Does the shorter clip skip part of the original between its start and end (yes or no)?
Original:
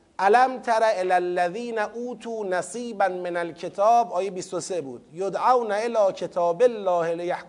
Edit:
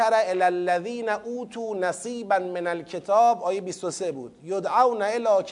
no